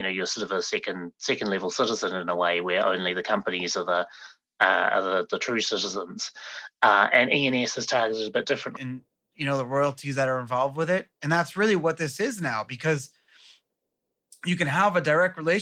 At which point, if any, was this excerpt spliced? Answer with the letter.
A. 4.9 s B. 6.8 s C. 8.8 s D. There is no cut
C